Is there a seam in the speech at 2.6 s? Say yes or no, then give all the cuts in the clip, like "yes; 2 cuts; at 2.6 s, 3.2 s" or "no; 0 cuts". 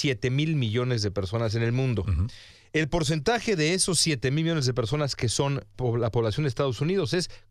no; 1 cut; at 5.7 s